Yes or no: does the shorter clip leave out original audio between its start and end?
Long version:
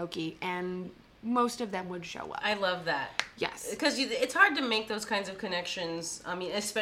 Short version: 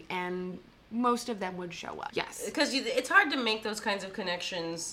yes